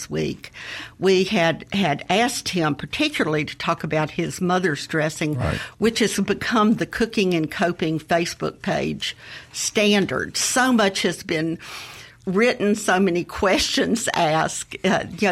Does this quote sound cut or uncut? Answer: uncut